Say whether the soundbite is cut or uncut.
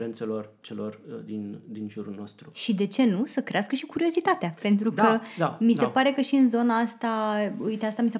uncut